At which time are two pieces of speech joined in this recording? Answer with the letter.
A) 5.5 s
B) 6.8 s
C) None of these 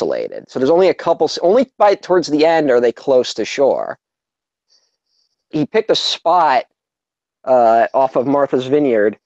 A